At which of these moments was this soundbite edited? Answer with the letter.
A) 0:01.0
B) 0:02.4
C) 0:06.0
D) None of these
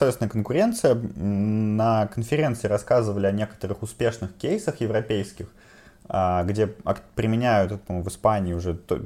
D